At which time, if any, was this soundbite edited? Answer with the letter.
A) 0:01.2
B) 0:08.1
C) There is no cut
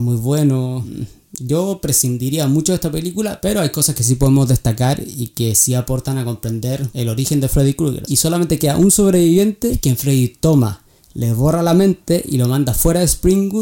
B